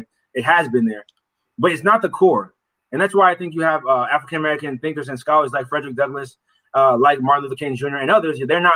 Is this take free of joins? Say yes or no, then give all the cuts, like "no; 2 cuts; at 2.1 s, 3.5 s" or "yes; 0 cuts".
yes; 0 cuts